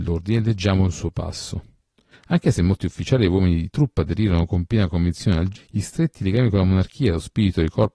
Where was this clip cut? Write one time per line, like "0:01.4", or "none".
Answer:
0:02.1
0:05.6